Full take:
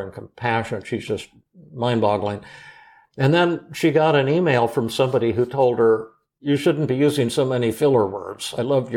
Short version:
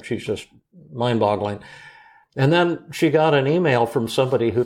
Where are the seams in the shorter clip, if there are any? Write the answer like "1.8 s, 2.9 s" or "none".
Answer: none